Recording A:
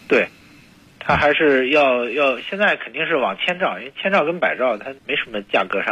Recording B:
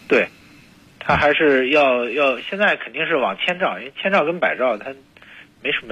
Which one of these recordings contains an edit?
A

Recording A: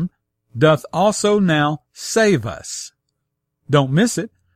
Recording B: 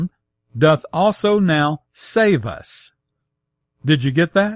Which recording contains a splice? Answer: A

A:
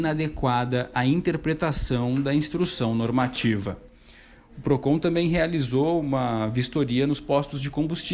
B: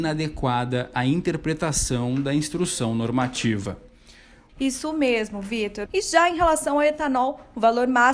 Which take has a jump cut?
B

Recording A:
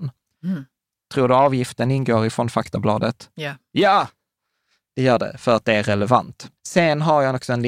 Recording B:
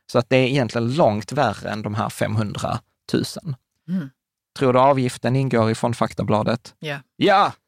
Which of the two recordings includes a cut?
A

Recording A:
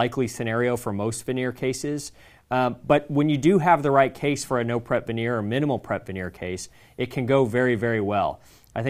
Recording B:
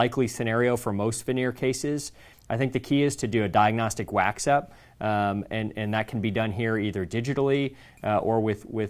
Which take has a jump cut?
B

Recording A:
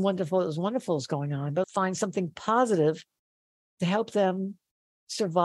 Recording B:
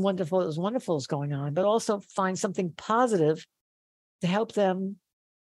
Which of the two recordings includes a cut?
A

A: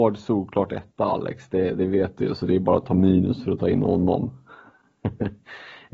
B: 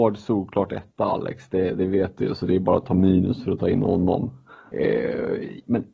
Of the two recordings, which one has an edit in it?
B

